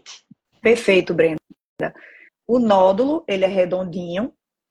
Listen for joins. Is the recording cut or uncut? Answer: cut